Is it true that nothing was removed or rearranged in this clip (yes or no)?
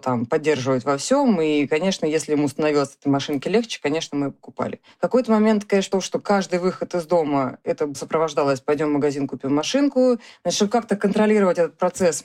no